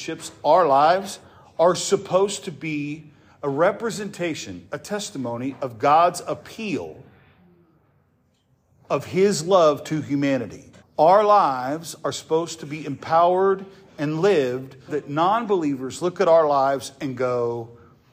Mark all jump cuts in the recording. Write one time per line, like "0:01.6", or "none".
0:10.8
0:14.9